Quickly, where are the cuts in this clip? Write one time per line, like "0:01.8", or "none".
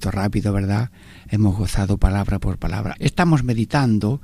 0:02.9